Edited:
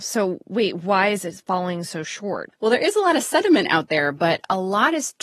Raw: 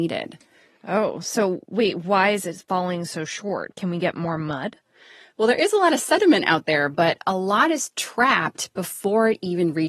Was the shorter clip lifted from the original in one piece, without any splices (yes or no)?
no